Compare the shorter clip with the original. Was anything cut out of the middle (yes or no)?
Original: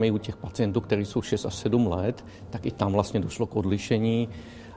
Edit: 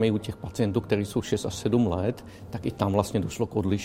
no